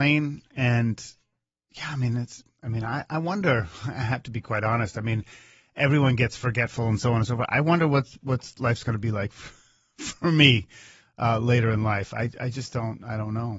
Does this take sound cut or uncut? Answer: uncut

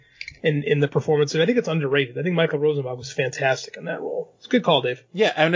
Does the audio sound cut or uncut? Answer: uncut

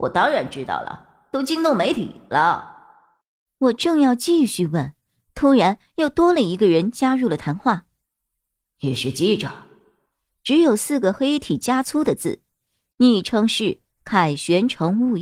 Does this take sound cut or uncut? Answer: uncut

